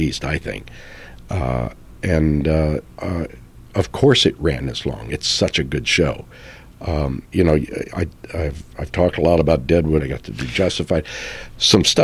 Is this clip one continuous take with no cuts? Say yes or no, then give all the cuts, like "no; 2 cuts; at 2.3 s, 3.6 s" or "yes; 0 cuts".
no; 2 cuts; at 7.3 s, 10.0 s